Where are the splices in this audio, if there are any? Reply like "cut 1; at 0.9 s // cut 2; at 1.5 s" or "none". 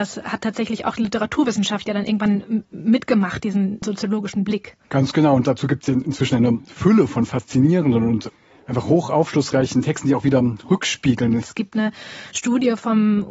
cut 1; at 4.8 s // cut 2; at 11.4 s